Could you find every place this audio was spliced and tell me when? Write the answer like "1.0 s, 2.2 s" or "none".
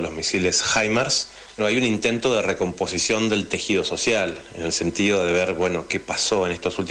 1.6 s